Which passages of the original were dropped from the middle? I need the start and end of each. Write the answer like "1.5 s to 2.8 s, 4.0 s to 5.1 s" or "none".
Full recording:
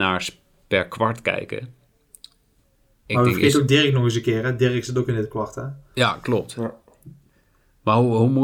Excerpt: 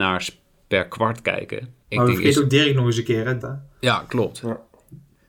1.8 s to 3.0 s, 4.6 s to 5.5 s